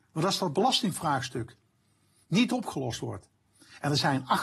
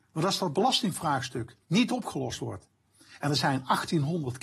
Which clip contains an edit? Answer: second; 1 cut; at 1.6 s

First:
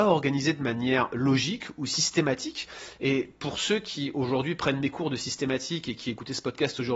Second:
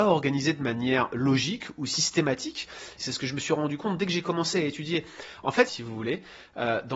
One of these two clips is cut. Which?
second; 2 cuts; at 3.0 s, 5.7 s

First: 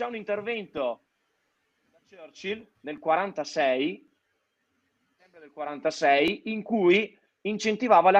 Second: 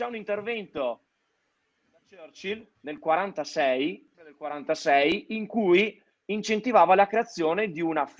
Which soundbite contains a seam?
second; 1 cut; at 4.1 s

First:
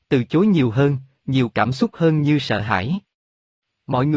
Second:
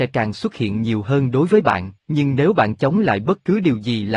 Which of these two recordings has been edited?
second; 1 cut; at 2.0 s

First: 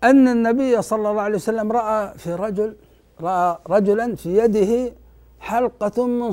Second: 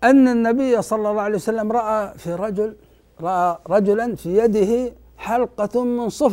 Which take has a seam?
second; 1 cut; at 5.1 s

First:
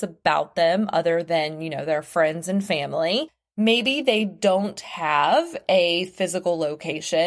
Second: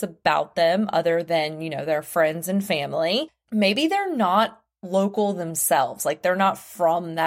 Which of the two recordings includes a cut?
second; 1 cut; at 3.4 s

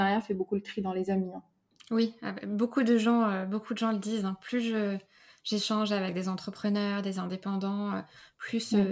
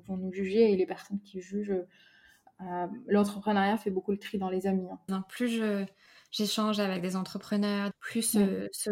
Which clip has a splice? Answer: second; 2 cuts; at 5.1 s, 7.9 s

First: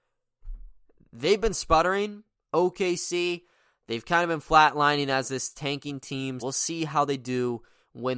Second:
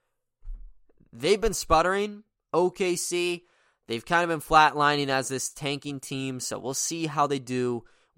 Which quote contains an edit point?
first; 1 cut; at 6.4 s

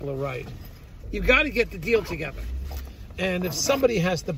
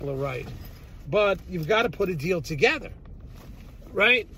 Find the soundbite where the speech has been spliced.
first; 1 cut; at 1.0 s

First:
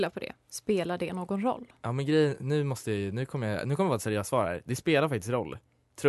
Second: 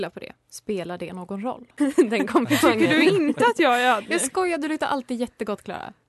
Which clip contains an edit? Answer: second; 1 cut; at 1.8 s

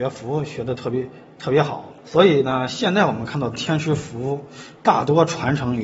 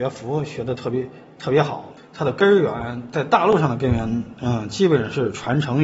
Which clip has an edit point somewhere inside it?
second; 1 cut; at 2.0 s

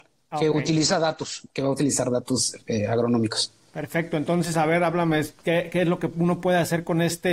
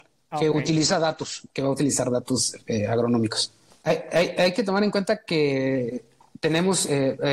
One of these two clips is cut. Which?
second; 1 cut; at 3.7 s

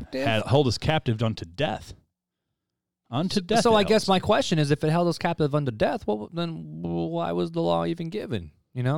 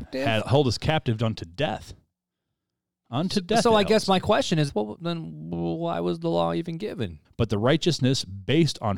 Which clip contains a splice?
second; 2 cuts; at 4.7 s, 7.2 s

